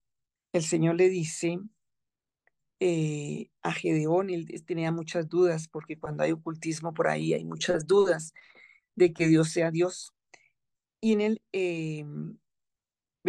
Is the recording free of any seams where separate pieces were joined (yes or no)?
yes